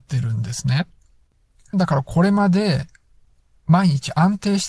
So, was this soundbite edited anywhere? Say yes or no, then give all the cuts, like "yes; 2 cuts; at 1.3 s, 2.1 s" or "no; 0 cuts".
yes; 1 cut; at 1.7 s